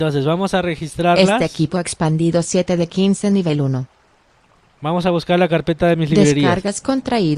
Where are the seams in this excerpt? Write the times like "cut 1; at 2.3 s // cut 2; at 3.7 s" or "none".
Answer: none